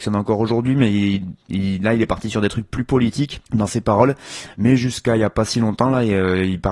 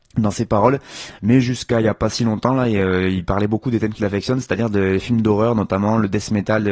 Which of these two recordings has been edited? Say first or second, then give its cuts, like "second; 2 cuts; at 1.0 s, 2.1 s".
first; 1 cut; at 3.5 s